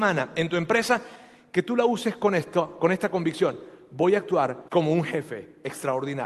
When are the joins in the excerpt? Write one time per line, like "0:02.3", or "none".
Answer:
0:04.7